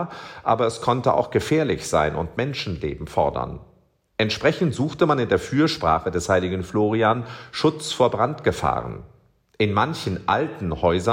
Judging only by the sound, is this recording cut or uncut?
uncut